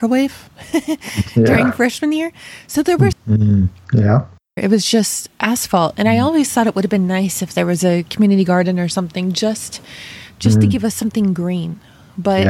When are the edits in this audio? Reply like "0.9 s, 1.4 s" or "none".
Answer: 3.1 s, 4.6 s